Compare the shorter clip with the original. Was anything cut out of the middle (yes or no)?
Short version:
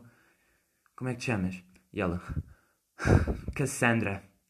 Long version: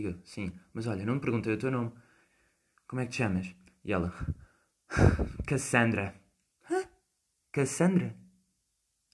no